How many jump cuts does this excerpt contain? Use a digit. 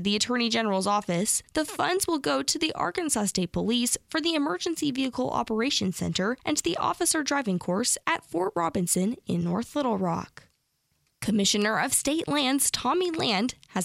0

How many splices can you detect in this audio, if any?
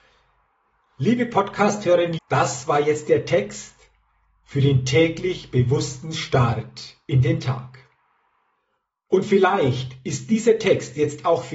1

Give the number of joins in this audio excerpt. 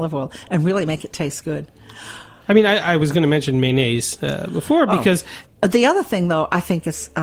2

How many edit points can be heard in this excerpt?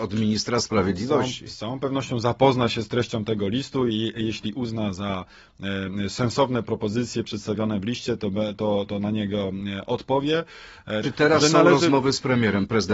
1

